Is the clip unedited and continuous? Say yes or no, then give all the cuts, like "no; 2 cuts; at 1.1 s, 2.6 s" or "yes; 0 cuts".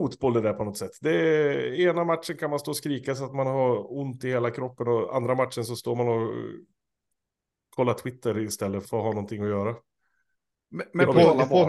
no; 1 cut; at 8.8 s